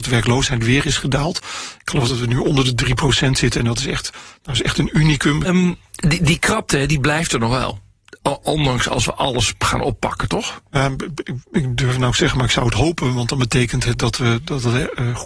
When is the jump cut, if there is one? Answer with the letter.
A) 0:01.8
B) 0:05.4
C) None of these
B